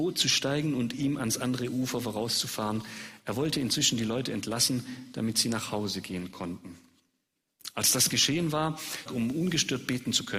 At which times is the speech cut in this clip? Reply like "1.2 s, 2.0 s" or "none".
9.1 s